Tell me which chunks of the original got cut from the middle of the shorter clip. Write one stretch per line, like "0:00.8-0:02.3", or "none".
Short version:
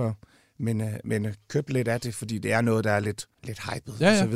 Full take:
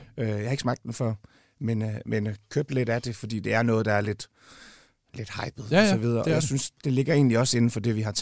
0:04.3-0:05.0